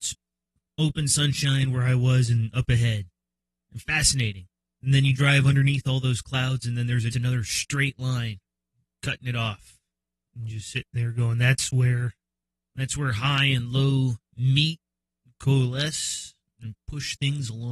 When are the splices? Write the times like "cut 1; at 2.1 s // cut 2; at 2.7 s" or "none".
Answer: cut 1; at 7.1 s